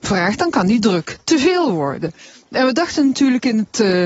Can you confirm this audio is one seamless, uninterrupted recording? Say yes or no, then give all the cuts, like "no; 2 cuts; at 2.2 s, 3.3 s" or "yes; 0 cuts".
yes; 0 cuts